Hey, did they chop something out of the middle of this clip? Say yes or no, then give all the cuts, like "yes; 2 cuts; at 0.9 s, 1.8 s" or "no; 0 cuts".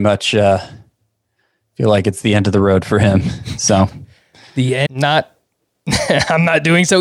yes; 1 cut; at 4.9 s